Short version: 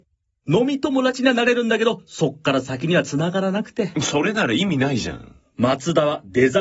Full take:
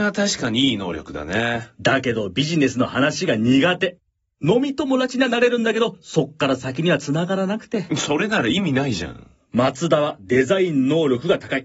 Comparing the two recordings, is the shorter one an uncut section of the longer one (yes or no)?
yes